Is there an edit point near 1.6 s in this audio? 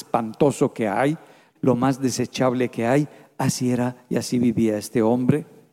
yes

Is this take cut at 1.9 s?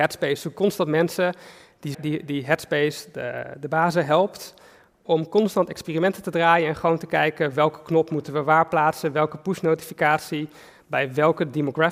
yes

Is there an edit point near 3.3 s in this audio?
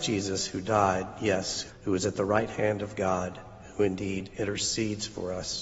no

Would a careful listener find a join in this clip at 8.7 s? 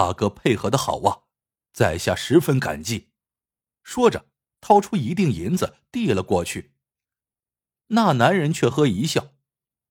yes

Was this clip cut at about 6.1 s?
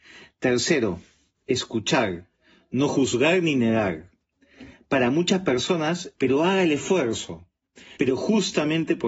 yes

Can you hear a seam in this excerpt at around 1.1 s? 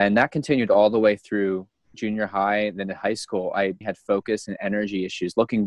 no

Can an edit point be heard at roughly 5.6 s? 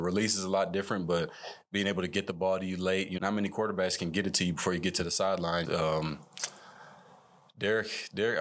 yes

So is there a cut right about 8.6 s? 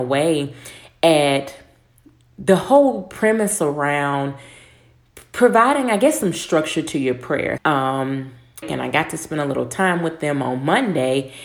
yes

